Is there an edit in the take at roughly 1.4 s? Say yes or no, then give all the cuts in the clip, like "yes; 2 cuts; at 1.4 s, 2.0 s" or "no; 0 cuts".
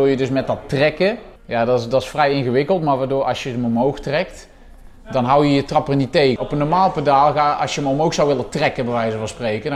yes; 2 cuts; at 1.4 s, 6.4 s